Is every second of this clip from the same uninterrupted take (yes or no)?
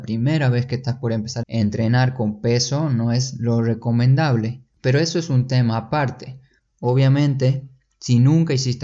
no